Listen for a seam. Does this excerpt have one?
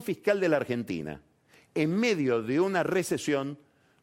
no; 0 cuts

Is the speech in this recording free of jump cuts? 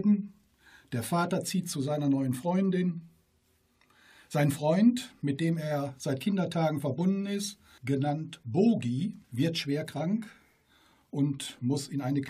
no; 2 cuts; at 7.8 s, 9.2 s

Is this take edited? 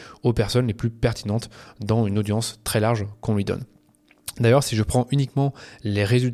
no; 0 cuts

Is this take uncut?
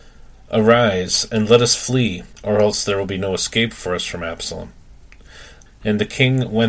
no; 2 cuts; at 2.3 s, 5.7 s

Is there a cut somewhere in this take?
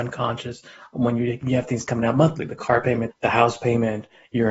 yes; 1 cut; at 3.1 s

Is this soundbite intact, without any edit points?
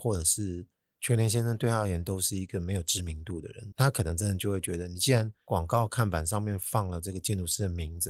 no; 1 cut; at 3.7 s

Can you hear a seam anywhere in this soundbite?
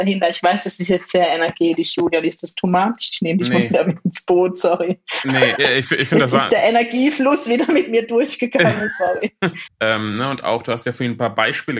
yes; 2 cuts; at 5.6 s, 9.7 s

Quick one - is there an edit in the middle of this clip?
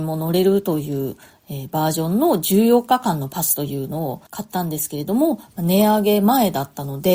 no; 0 cuts

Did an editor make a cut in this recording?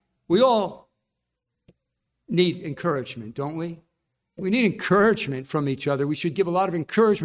no; 0 cuts

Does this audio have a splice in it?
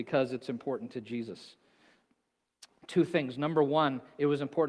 no; 0 cuts

